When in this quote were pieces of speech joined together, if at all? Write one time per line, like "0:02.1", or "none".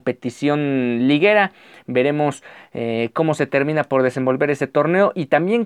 none